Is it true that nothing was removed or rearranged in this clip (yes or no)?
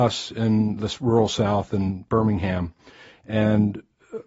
yes